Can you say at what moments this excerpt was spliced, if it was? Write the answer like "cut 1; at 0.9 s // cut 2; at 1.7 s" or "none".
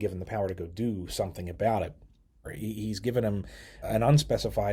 cut 1; at 2.4 s // cut 2; at 3.8 s